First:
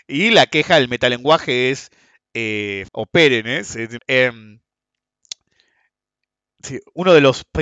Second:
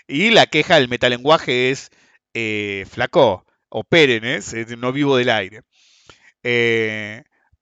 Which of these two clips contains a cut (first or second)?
first